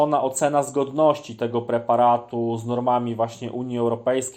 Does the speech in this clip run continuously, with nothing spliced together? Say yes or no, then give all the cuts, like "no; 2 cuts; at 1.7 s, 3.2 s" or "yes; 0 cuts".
yes; 0 cuts